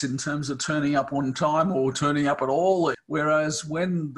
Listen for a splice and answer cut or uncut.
cut